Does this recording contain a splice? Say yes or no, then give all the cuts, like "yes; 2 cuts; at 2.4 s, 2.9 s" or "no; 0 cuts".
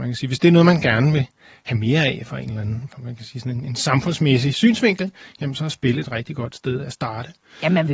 no; 0 cuts